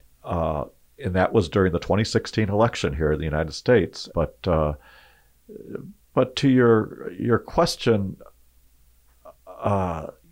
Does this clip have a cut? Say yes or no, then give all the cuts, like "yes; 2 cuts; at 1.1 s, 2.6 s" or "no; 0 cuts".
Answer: yes; 1 cut; at 4.1 s